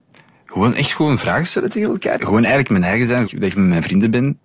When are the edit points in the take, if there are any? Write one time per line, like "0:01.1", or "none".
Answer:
0:02.2
0:03.3